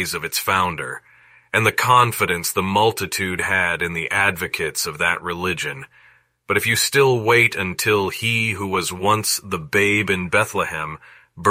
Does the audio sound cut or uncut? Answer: uncut